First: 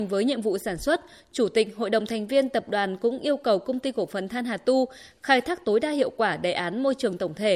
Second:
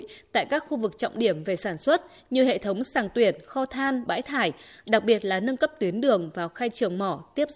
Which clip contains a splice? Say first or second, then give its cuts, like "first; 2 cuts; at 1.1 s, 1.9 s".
second; 1 cut; at 4.1 s